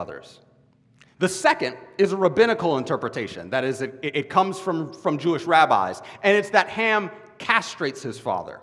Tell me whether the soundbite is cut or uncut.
cut